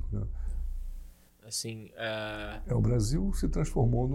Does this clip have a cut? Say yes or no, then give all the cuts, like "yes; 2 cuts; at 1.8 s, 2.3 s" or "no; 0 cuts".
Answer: yes; 1 cut; at 1.3 s